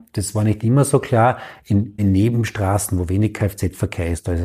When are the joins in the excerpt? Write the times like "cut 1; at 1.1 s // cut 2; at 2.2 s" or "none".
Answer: cut 1; at 2.0 s